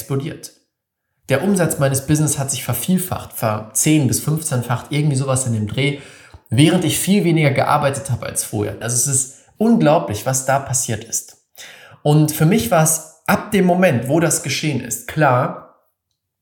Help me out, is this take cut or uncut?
cut